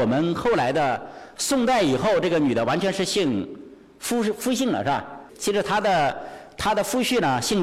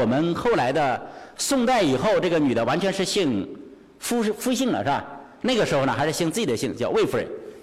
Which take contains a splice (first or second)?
first